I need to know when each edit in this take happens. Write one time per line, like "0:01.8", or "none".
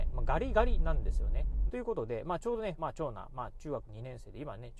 0:01.7
0:02.8